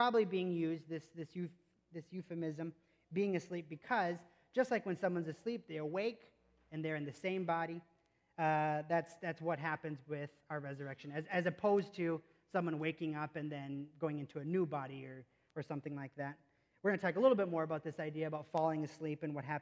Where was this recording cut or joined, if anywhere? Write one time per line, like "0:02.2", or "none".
none